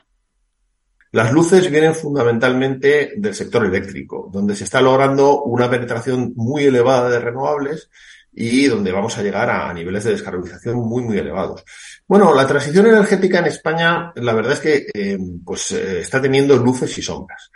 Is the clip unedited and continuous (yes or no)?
no